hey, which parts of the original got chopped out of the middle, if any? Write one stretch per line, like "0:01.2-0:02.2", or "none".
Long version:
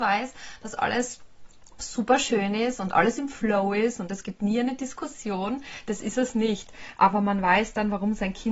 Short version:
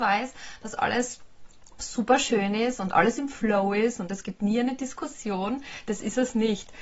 none